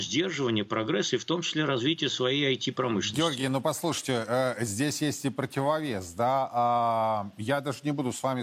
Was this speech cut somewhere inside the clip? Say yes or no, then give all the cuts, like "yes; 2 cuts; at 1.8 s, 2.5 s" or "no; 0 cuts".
no; 0 cuts